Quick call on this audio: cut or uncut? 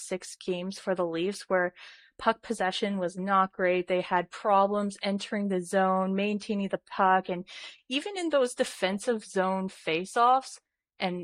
uncut